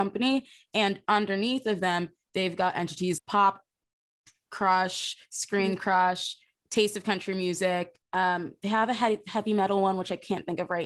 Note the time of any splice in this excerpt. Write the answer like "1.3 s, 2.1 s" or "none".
3.2 s, 8.0 s